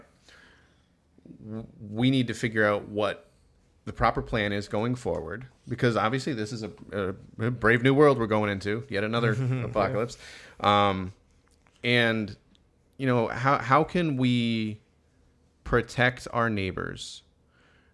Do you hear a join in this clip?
no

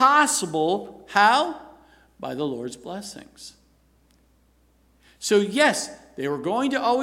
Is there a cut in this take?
no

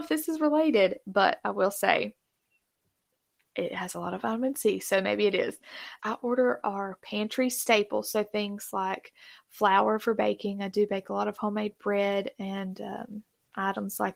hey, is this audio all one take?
no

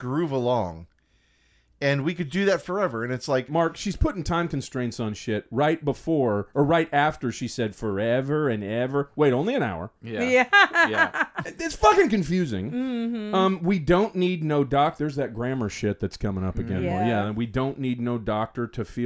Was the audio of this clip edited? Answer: no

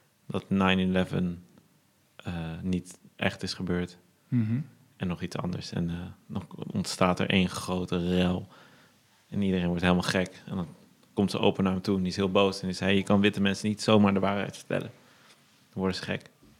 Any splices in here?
no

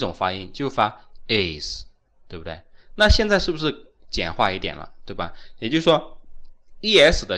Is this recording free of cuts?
yes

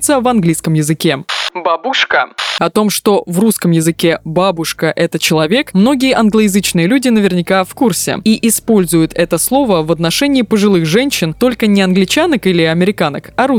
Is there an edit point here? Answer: no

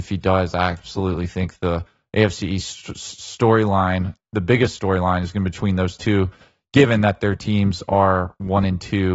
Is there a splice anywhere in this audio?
no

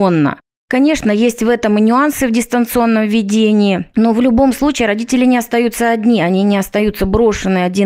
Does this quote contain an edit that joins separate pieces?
no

